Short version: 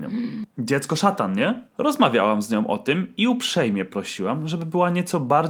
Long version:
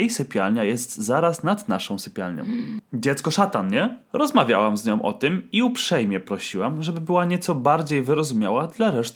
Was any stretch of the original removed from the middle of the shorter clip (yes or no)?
no